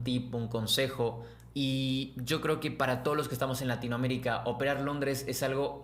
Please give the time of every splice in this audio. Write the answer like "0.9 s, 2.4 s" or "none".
1.5 s